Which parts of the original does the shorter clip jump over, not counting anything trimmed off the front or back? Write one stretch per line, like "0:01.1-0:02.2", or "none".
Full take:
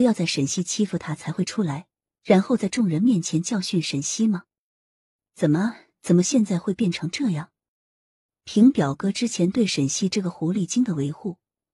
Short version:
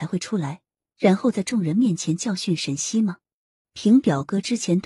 0:04.9-0:08.4